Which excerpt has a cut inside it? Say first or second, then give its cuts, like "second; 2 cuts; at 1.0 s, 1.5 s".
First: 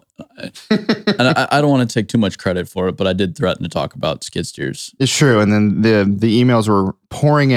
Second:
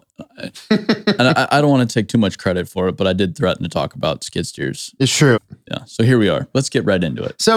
second; 2 cuts; at 5.3 s, 6.5 s